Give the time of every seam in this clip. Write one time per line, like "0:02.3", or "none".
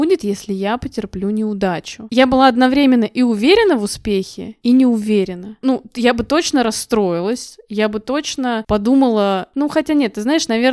0:05.6